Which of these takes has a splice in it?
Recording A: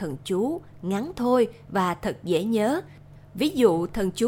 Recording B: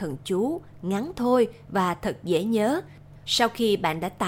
B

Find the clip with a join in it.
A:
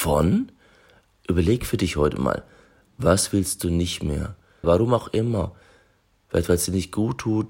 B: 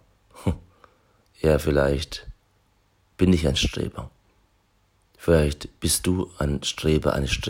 A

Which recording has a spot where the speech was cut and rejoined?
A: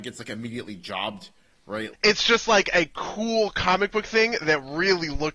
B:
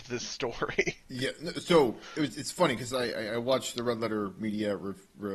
A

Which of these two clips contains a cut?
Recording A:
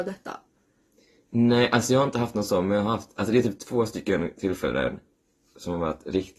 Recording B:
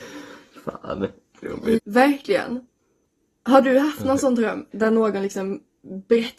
B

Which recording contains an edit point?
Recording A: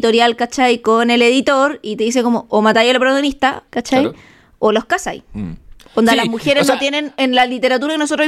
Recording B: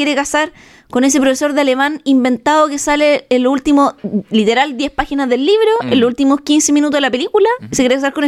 A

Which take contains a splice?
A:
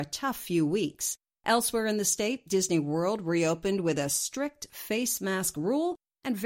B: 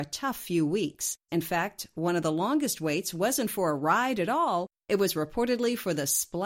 B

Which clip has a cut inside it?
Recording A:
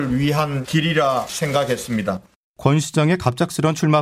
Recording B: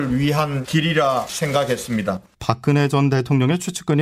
B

